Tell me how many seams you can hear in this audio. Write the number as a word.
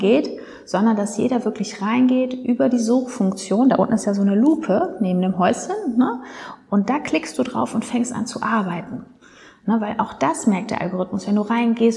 zero